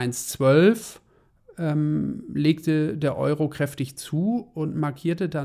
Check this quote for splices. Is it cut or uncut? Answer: uncut